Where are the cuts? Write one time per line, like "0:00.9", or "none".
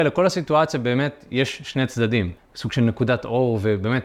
0:02.4